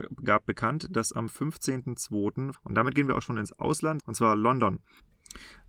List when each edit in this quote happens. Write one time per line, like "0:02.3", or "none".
0:02.5
0:04.0